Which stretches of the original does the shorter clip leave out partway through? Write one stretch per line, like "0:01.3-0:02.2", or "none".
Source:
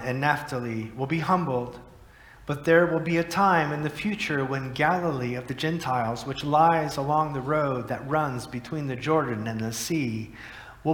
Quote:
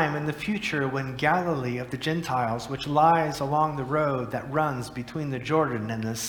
none